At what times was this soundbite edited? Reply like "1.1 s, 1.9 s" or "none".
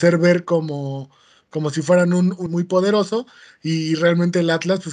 2.5 s